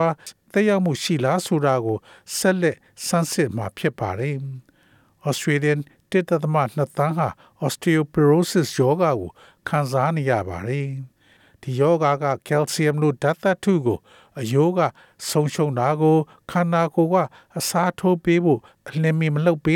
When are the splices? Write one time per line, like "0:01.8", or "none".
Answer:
none